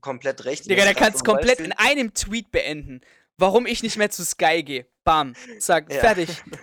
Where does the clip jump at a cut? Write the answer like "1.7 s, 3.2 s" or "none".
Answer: none